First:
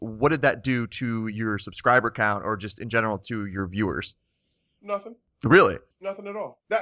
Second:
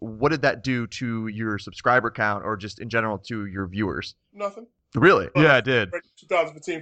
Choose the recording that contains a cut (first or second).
second